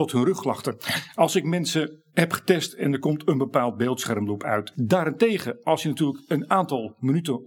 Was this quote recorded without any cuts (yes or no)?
no